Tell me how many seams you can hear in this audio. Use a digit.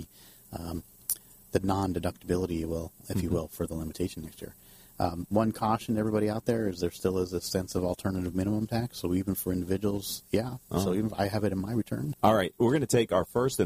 2